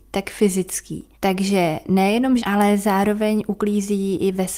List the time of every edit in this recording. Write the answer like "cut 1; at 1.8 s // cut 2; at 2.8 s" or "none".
cut 1; at 1.1 s // cut 2; at 2.4 s